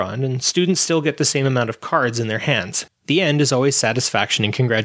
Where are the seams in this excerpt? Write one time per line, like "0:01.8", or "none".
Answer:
0:02.9